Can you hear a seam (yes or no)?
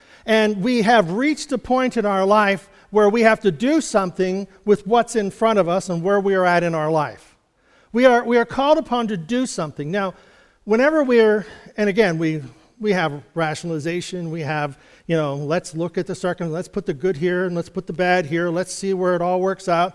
no